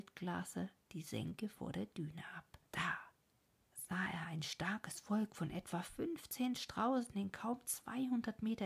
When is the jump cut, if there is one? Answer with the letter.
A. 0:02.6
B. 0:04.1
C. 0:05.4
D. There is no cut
A